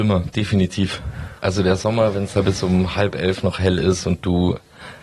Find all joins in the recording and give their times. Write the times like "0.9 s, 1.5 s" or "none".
none